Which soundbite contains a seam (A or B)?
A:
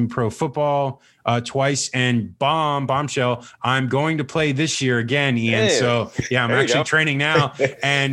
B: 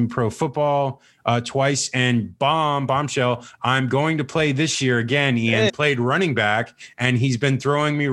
B